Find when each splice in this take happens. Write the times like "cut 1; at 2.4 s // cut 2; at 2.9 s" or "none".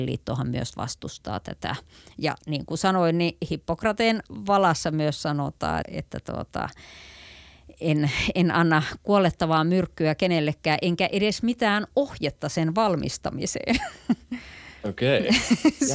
cut 1; at 5.8 s